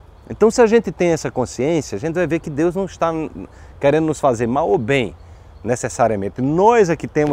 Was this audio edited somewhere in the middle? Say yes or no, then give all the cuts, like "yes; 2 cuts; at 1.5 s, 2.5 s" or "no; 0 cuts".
no; 0 cuts